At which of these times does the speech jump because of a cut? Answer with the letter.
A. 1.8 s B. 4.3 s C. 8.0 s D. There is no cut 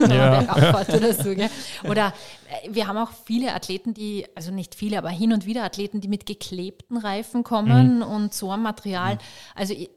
D